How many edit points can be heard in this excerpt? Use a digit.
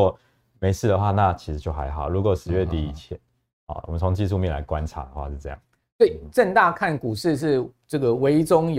0